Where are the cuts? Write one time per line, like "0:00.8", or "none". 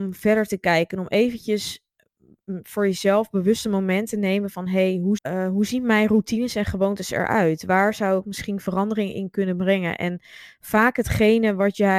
0:05.2

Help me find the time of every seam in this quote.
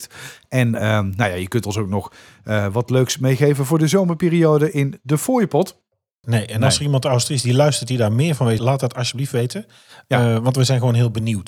0:06.2
0:08.6

